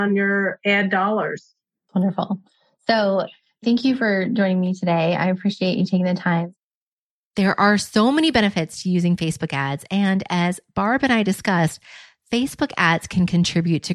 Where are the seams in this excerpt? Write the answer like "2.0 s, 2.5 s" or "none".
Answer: none